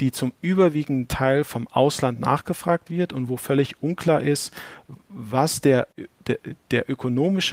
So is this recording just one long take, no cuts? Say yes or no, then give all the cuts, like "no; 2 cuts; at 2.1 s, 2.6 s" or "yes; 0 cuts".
yes; 0 cuts